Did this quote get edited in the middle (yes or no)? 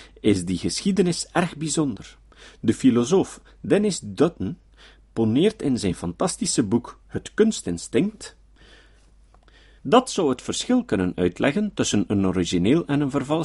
yes